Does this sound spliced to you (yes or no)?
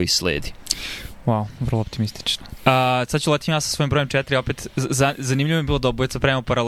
no